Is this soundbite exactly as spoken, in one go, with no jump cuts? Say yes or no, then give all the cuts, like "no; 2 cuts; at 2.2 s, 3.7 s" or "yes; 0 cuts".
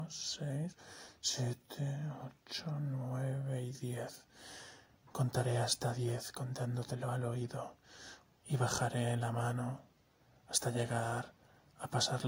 no; 2 cuts; at 4.9 s, 8.2 s